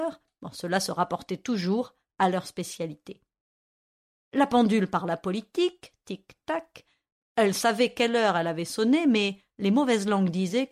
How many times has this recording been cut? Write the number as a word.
zero